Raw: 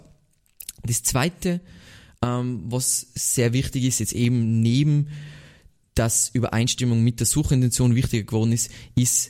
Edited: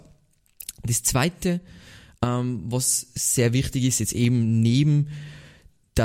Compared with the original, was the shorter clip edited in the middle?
no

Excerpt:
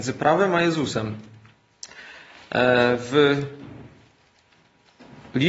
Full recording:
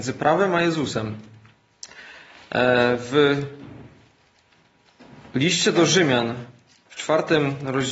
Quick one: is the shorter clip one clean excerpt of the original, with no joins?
yes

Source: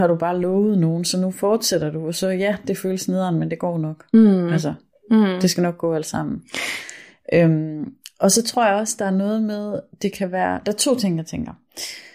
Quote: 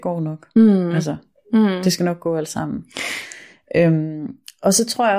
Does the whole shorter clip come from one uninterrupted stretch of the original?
yes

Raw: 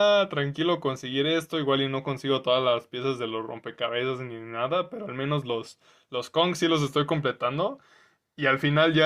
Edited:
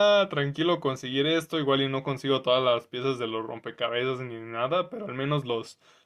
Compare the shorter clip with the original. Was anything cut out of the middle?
no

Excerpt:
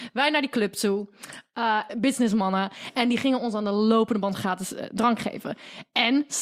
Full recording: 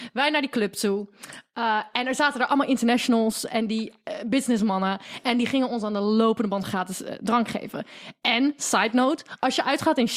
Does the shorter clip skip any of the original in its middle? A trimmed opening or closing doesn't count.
yes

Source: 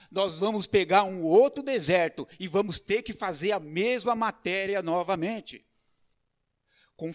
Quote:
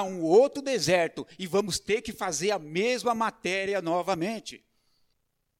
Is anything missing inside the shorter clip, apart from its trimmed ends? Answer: no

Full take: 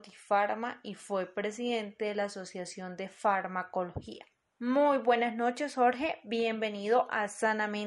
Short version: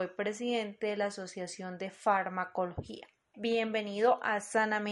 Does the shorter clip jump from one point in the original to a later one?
yes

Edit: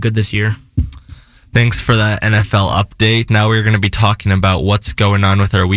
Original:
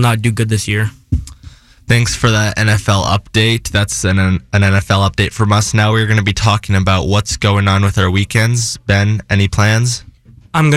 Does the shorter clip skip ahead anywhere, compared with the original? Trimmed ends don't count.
yes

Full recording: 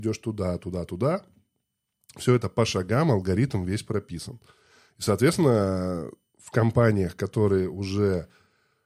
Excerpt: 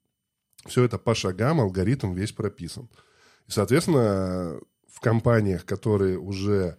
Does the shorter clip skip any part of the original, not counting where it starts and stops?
no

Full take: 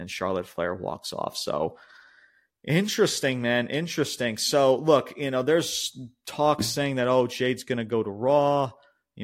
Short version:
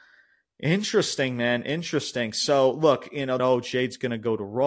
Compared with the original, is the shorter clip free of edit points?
no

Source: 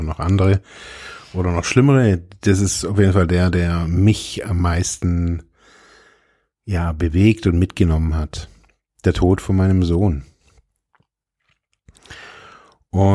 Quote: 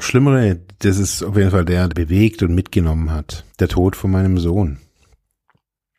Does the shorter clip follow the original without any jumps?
no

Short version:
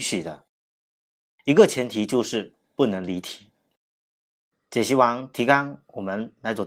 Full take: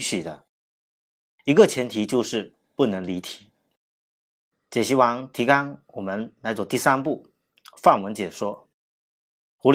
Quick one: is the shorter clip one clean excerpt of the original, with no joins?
yes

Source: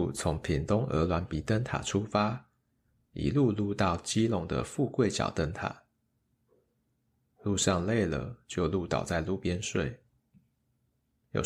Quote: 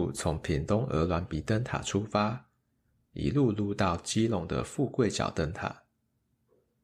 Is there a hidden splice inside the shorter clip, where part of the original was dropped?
no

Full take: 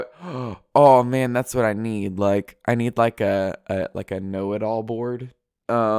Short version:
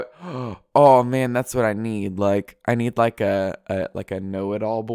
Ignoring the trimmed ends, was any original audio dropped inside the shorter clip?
no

